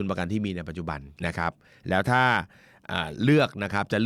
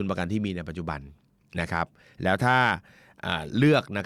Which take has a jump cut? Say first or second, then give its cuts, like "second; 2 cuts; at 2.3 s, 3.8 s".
first; 1 cut; at 1.2 s